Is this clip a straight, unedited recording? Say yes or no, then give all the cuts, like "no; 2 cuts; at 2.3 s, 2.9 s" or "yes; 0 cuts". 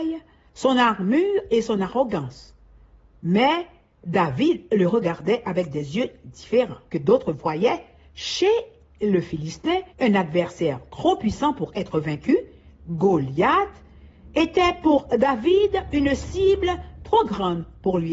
no; 2 cuts; at 6.9 s, 9.9 s